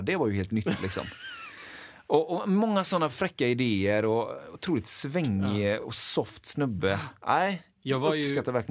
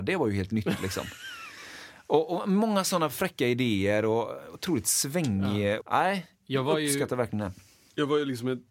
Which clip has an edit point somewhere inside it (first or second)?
second